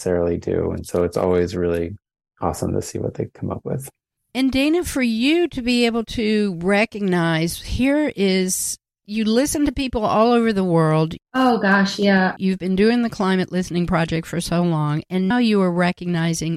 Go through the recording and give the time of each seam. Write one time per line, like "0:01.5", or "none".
0:11.2
0:12.4
0:15.3